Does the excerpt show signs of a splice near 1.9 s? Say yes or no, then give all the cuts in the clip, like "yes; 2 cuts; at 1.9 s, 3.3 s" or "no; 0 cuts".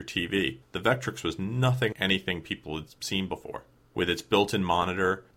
yes; 1 cut; at 1.9 s